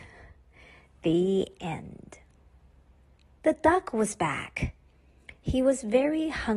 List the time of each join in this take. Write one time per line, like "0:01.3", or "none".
0:03.4